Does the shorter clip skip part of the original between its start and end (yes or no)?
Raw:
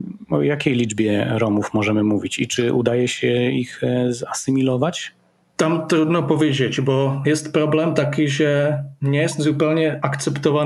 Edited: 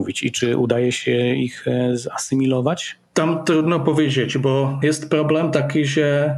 yes